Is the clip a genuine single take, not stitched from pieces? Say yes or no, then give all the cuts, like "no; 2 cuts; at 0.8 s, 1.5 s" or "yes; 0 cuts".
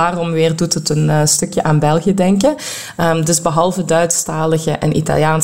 yes; 0 cuts